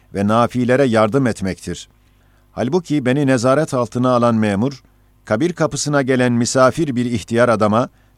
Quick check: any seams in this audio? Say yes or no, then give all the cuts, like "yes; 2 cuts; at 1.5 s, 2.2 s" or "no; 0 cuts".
no; 0 cuts